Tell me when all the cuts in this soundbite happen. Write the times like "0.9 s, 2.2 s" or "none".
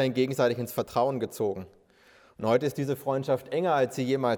none